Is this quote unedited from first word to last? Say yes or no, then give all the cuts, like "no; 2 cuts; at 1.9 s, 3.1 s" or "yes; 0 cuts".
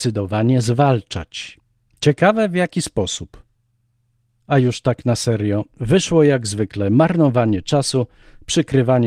yes; 0 cuts